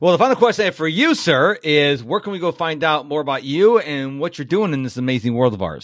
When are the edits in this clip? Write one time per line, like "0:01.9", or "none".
none

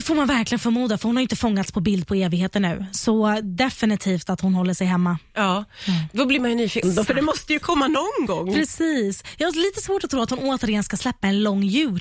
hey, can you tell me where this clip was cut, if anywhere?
0:06.8

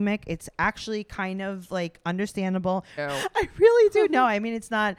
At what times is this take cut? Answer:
0:03.0

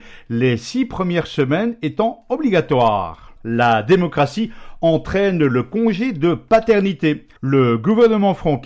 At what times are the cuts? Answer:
0:03.4
0:07.4

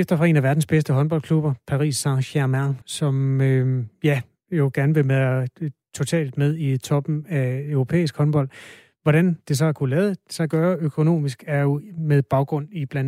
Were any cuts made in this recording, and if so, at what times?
0:02.8

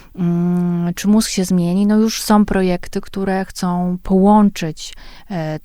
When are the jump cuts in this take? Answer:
none

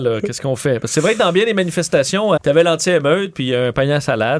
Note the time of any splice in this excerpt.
0:02.4

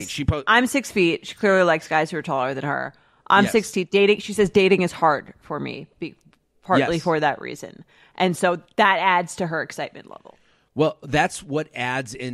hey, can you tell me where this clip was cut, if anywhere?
none

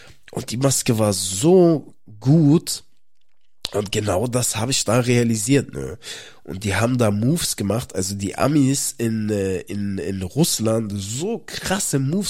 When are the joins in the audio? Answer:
none

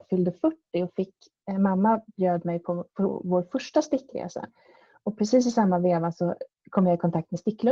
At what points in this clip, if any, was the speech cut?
none

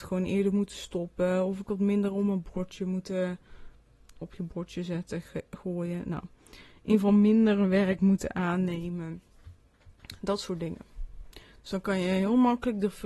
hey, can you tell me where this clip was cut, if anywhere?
0:04.2

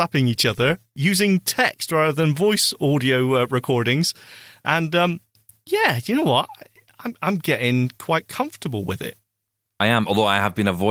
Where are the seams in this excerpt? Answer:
none

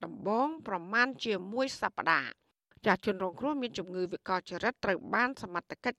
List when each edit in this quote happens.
none

